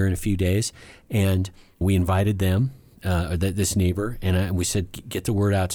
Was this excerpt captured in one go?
no; 1 cut; at 1.8 s

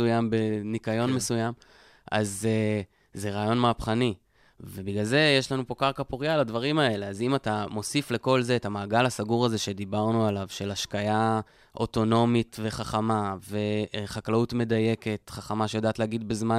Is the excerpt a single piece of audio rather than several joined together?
yes; 0 cuts

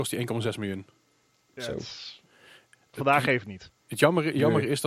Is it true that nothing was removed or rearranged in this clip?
yes; 0 cuts

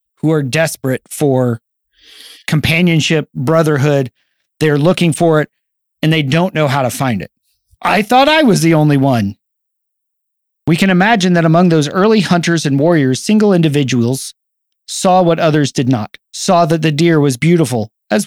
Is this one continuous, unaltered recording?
no; 2 cuts; at 7.8 s, 16.2 s

